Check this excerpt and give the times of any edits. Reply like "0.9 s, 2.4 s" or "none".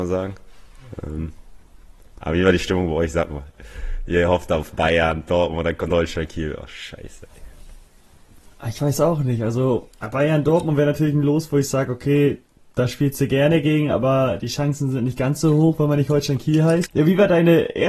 16.9 s